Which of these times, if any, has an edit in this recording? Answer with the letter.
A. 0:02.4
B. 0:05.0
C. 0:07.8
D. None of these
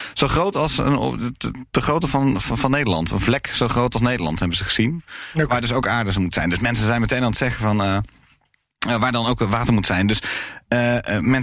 A